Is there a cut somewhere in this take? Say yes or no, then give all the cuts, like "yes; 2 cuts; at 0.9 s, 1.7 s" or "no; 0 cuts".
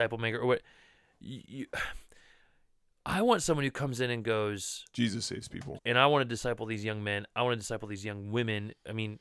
yes; 1 cut; at 5.8 s